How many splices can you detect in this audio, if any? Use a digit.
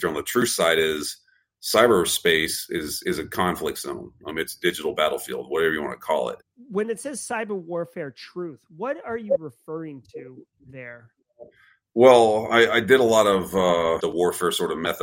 2